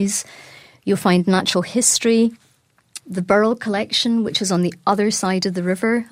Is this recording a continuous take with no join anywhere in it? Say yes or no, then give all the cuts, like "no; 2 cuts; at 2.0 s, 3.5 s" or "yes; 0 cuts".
no; 1 cut; at 3.0 s